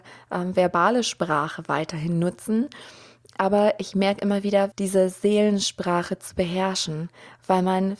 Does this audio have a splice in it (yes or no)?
yes